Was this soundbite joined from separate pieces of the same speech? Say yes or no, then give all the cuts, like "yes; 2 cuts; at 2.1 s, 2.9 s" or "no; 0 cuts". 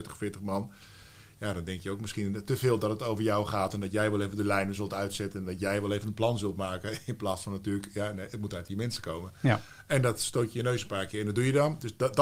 no; 0 cuts